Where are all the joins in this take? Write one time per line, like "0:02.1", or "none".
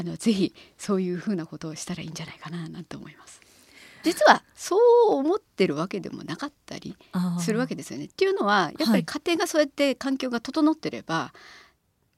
0:04.0